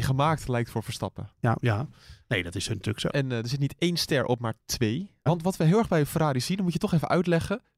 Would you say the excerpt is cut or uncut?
cut